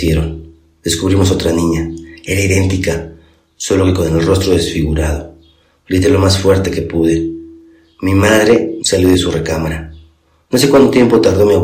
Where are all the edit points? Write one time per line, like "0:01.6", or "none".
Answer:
0:08.8